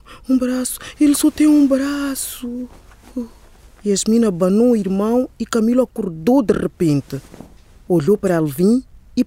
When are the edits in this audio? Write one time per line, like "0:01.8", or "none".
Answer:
none